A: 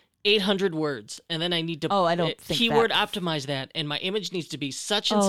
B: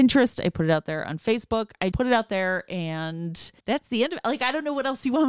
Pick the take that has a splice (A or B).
B